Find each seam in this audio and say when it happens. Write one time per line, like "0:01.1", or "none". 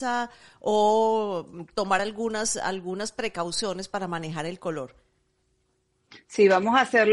none